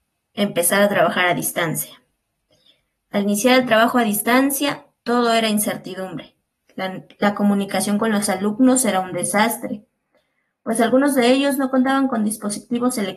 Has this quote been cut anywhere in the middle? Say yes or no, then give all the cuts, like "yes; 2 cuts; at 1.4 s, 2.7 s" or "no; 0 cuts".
no; 0 cuts